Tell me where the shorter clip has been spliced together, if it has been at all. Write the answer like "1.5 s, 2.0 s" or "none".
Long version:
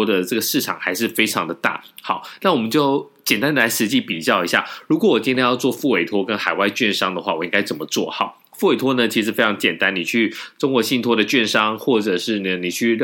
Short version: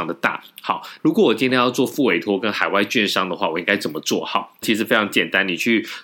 1.0 s, 4.6 s